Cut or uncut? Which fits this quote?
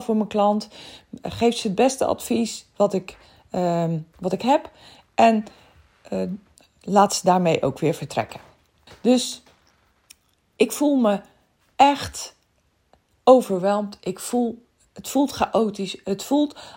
cut